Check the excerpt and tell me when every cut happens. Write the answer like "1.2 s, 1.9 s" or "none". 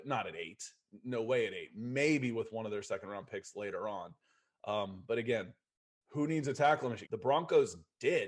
7.0 s